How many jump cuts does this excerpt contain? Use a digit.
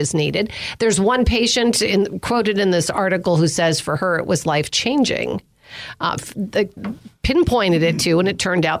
1